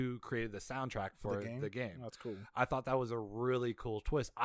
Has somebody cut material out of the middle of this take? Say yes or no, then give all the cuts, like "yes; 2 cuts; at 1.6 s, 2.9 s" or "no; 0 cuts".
no; 0 cuts